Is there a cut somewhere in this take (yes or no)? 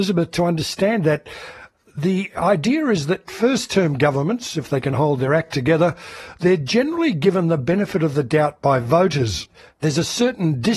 no